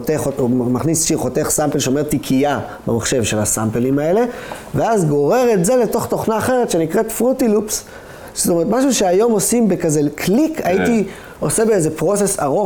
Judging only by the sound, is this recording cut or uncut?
uncut